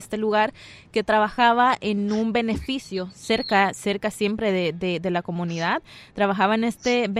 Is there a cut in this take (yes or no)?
no